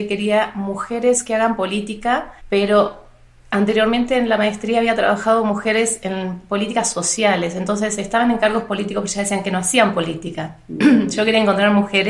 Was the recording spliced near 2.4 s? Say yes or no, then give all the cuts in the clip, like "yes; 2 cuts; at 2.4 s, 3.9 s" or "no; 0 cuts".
yes; 1 cut; at 2.4 s